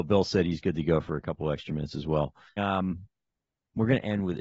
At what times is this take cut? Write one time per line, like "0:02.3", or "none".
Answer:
0:02.6